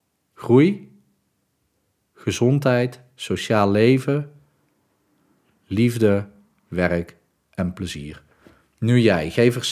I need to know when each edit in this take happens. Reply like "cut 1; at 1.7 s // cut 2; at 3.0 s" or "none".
none